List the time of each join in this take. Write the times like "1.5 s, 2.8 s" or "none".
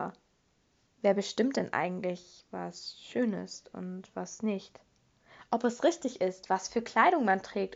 none